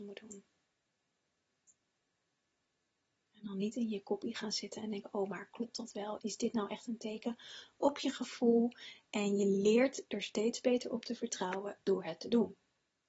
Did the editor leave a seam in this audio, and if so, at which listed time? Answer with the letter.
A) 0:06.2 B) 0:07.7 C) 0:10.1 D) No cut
A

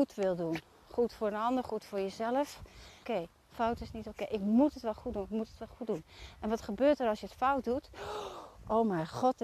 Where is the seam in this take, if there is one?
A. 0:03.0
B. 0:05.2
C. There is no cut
A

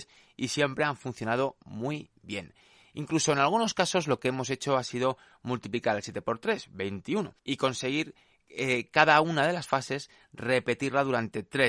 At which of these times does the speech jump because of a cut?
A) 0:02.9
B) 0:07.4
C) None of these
B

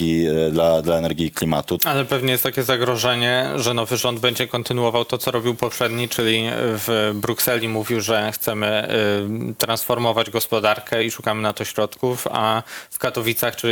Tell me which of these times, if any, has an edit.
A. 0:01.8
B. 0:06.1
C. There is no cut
A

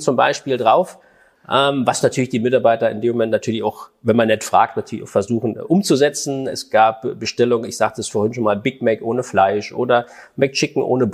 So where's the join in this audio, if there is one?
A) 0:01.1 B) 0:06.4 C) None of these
C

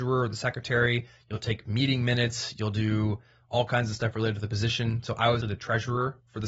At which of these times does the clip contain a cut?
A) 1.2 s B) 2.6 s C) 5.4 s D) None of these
C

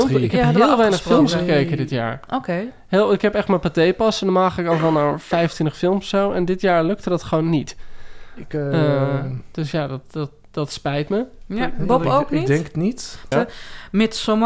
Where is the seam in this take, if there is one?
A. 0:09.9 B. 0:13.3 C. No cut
B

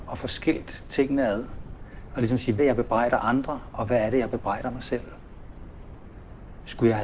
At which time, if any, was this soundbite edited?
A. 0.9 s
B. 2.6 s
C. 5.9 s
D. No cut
B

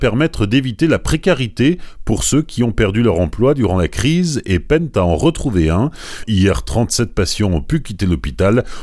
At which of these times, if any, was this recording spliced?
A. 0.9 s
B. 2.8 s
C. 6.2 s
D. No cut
C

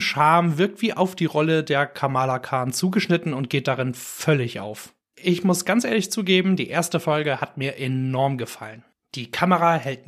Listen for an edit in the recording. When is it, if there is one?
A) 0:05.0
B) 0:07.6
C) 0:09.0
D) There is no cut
A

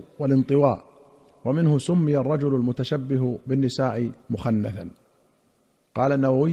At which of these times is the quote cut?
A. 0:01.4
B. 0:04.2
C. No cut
B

